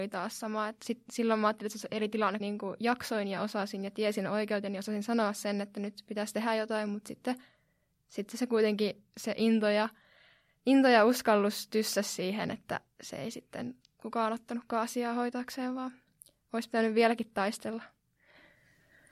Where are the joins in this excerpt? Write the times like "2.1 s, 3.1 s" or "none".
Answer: 2.4 s